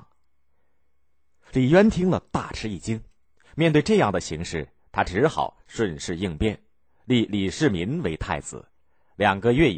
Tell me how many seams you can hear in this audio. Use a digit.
0